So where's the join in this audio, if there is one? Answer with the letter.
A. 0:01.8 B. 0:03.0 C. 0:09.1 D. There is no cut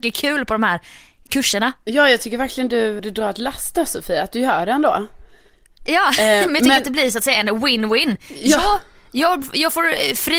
B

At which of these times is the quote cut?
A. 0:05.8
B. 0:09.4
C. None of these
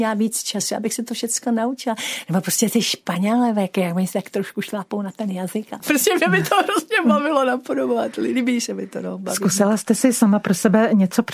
C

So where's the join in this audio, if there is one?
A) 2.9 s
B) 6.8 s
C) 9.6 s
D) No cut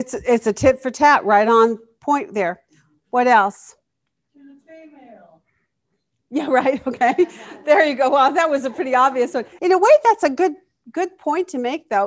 C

